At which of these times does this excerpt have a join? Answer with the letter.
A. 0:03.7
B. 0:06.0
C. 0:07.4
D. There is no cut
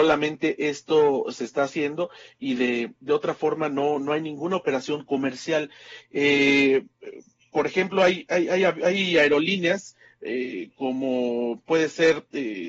B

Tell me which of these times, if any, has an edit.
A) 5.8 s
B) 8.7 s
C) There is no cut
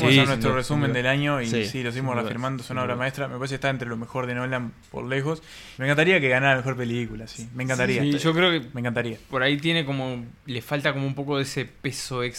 A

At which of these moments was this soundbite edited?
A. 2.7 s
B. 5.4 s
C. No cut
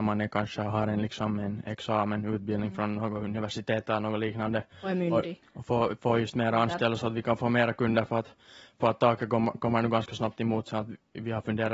B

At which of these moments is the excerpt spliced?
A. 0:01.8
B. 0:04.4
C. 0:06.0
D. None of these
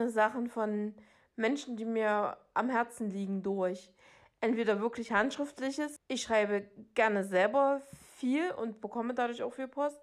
C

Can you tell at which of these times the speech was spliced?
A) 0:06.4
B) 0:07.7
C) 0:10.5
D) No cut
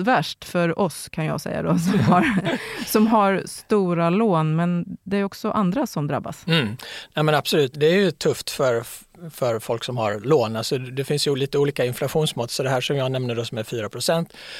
B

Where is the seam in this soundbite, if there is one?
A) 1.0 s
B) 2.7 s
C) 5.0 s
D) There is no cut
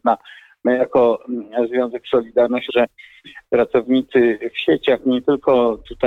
B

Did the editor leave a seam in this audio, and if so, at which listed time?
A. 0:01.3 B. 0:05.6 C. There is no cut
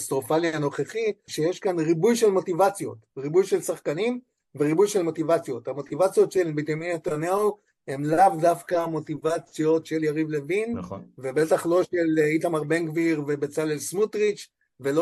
A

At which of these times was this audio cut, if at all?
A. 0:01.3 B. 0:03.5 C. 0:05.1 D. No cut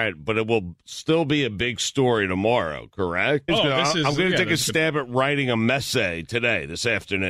B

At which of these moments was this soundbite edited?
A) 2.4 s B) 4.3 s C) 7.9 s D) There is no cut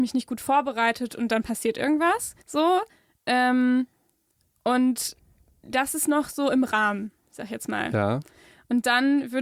A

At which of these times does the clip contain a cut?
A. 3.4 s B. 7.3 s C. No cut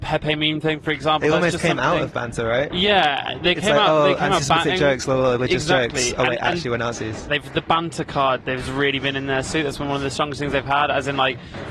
B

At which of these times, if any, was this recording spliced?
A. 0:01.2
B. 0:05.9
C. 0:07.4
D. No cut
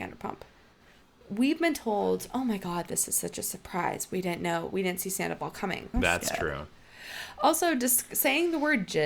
B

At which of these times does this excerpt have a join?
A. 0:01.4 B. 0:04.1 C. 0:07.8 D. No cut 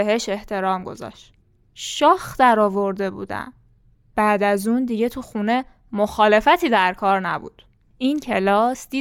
C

